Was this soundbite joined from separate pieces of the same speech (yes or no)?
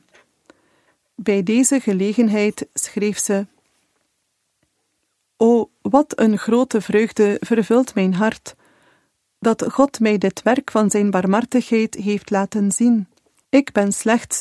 yes